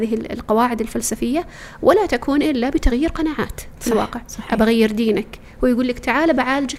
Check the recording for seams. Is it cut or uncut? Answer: cut